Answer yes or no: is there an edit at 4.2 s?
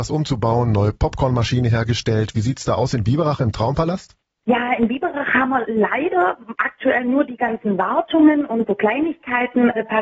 no